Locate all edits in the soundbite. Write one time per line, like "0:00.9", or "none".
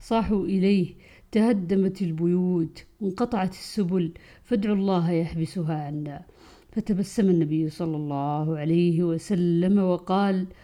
none

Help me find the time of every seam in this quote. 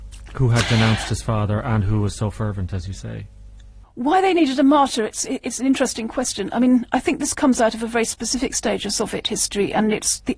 0:05.2

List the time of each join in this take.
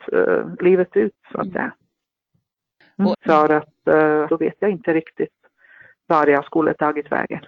0:03.1
0:04.3

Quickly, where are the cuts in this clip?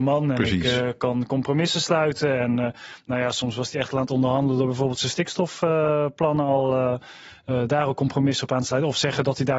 none

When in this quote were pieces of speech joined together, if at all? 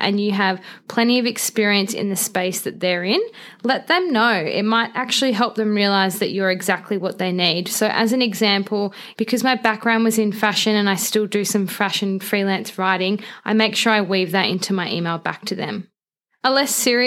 0:09.1

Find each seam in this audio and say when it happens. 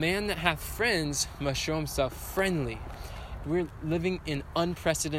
0:03.4

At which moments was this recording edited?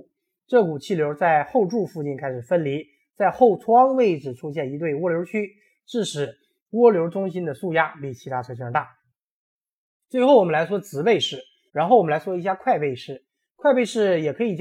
0:11.7

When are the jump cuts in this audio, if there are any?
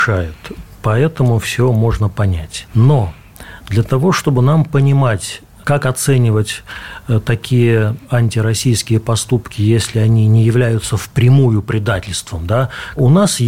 none

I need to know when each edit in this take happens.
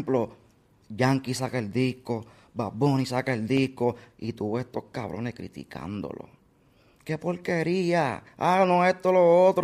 0:04.1
0:08.3

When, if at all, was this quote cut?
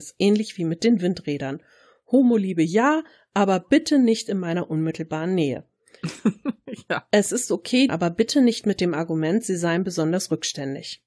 0:07.9

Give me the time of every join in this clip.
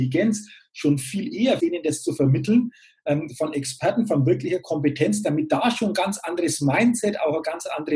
0:01.6

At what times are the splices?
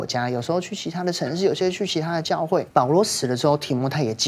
0:02.7

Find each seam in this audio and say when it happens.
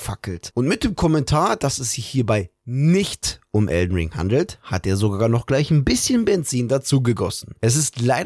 none

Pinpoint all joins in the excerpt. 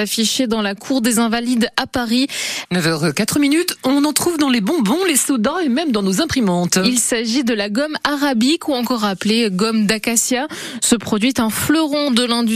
0:02.7

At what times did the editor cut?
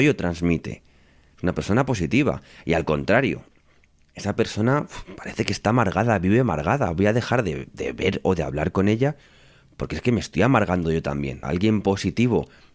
0:11.4

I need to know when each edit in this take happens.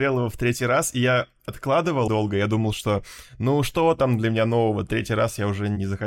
0:02.1

